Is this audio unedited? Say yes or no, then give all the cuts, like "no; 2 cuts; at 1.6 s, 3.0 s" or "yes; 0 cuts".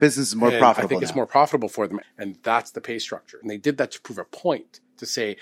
no; 2 cuts; at 2.0 s, 3.4 s